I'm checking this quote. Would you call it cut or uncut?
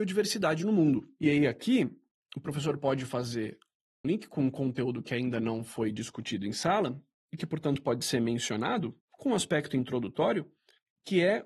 cut